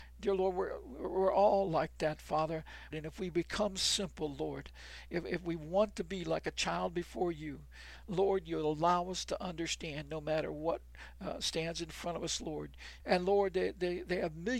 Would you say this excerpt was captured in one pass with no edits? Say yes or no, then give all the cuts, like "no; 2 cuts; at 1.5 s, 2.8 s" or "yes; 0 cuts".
no; 2 cuts; at 2.9 s, 13.0 s